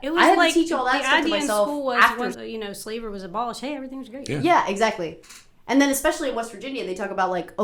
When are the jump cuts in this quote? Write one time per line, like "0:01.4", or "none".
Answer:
0:02.3